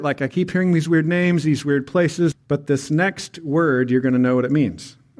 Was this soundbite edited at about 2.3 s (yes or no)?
yes